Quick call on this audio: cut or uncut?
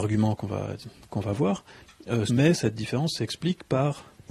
cut